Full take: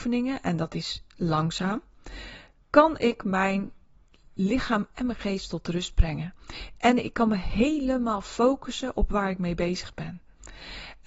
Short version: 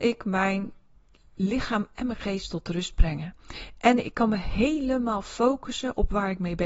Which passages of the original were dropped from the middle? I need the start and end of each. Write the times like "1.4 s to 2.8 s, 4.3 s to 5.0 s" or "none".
none